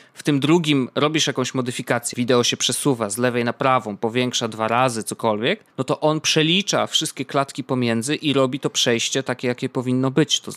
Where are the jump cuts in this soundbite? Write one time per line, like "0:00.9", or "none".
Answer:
0:02.1
0:05.7